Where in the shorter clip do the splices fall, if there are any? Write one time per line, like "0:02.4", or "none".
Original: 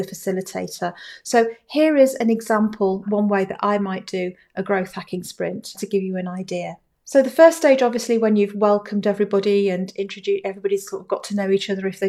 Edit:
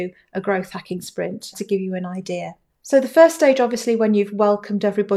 none